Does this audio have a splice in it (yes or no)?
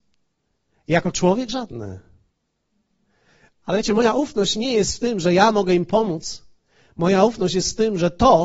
no